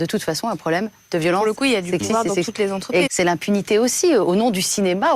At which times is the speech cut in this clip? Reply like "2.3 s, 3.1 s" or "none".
3.1 s